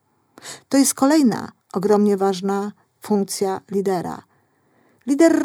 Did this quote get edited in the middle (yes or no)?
no